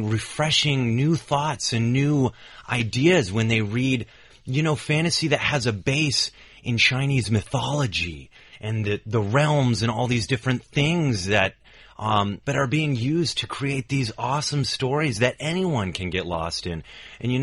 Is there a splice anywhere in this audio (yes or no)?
yes